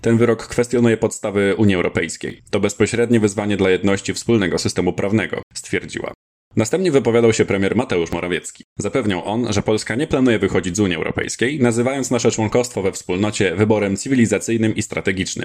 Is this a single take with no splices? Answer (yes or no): yes